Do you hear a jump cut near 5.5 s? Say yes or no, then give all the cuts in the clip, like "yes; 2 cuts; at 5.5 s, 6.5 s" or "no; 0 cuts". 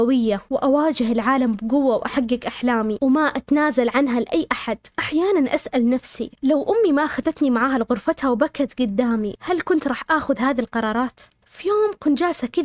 no; 1 cut; at 11.4 s